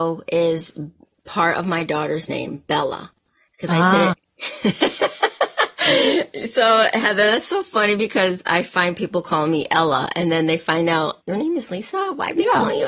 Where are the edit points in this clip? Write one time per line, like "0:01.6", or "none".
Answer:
0:04.1
0:11.2